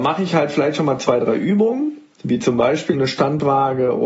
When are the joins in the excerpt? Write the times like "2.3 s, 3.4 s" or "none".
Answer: 2.9 s